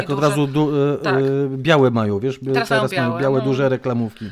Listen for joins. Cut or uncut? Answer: uncut